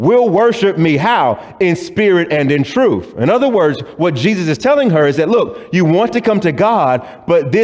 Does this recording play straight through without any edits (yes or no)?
yes